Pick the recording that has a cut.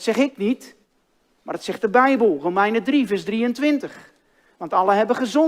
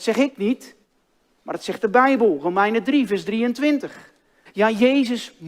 second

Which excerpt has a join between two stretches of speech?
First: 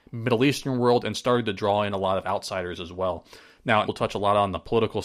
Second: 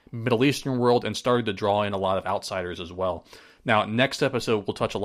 first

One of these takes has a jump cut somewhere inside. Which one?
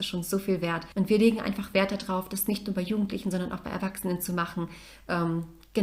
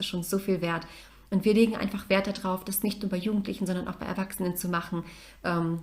first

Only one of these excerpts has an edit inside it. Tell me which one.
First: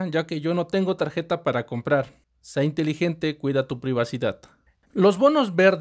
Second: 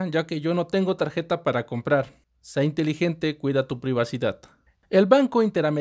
first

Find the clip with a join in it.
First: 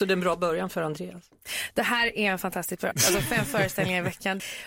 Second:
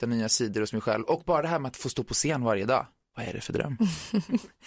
first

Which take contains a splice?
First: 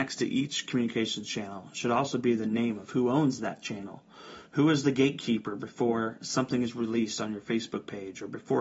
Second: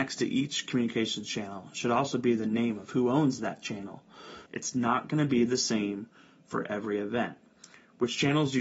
second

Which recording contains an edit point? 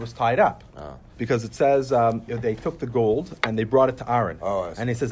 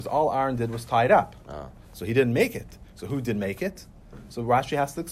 first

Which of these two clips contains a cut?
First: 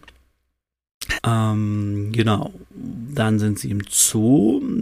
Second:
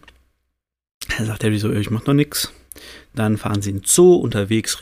first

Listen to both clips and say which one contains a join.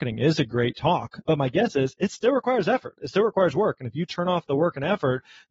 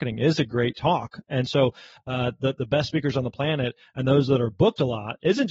first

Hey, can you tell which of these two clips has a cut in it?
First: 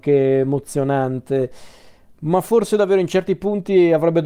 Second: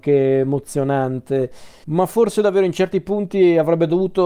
second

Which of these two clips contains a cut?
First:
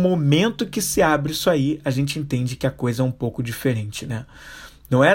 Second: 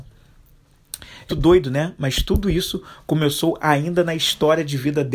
second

